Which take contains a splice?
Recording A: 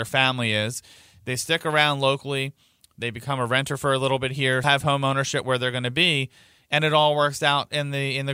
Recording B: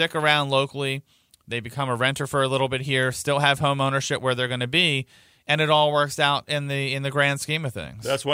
A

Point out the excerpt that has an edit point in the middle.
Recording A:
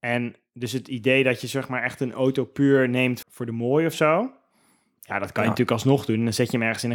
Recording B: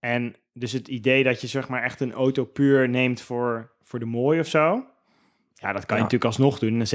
A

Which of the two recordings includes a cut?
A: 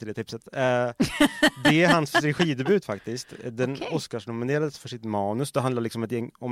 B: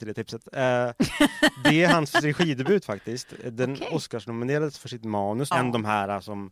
B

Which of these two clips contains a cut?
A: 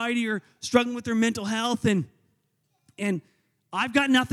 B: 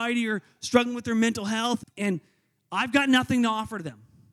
B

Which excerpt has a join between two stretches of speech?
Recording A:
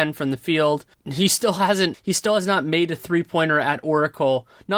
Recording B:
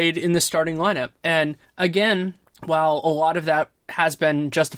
A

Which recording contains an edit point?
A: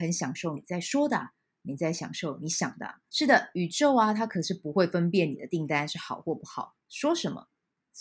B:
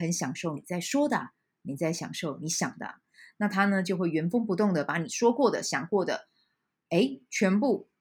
A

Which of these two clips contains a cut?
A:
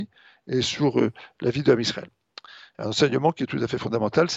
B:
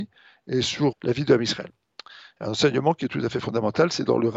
B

